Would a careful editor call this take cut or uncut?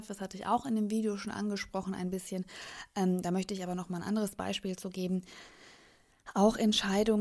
uncut